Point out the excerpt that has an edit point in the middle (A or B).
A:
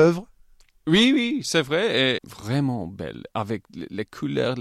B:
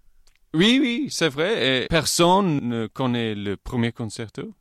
A